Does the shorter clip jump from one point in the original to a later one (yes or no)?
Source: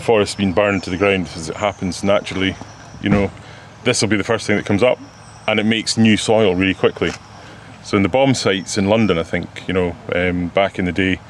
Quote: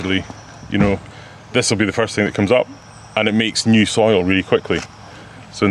no